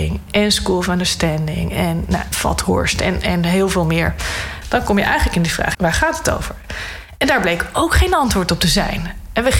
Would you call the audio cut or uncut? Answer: cut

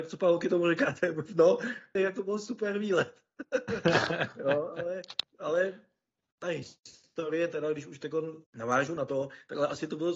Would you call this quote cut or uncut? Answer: cut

